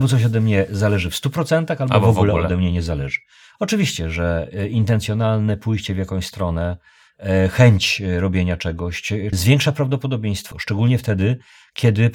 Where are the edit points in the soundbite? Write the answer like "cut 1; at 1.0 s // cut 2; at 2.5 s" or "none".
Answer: cut 1; at 9.3 s // cut 2; at 10.5 s